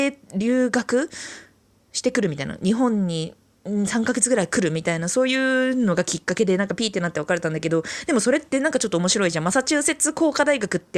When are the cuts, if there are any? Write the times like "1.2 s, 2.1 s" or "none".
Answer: none